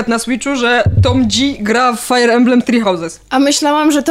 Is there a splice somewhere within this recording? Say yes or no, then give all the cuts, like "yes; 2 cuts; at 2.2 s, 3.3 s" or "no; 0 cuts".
no; 0 cuts